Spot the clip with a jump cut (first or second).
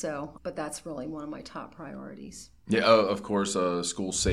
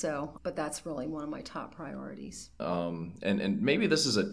second